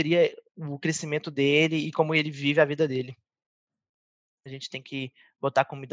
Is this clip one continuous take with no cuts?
no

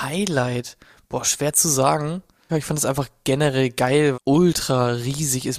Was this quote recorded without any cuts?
no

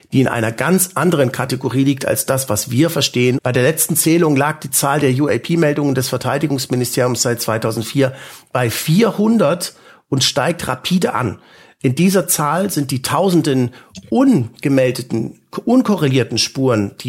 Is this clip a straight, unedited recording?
no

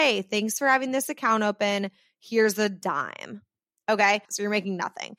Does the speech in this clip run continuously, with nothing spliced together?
no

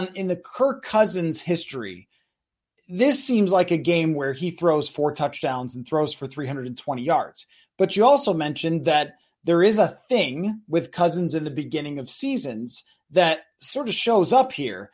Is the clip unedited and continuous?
yes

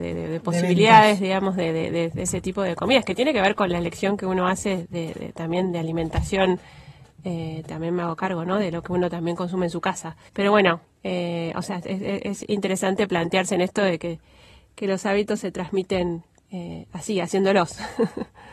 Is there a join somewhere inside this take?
yes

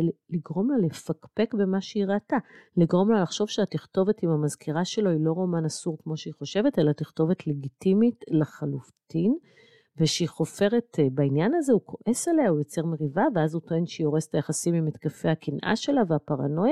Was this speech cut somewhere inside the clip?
no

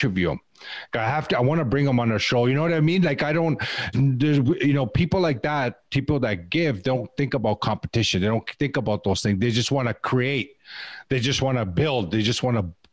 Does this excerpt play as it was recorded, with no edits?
no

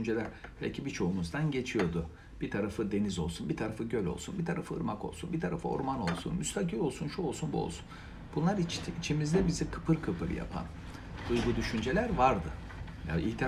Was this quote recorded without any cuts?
yes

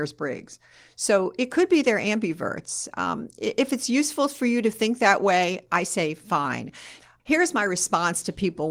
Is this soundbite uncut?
yes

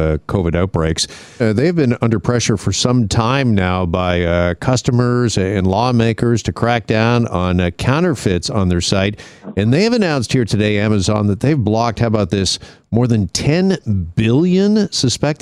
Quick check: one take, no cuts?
no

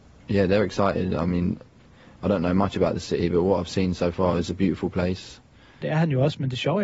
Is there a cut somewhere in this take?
yes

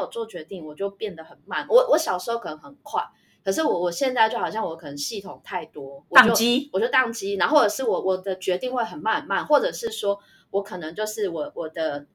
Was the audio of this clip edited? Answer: no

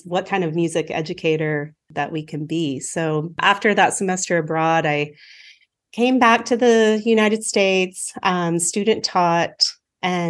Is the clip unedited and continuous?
yes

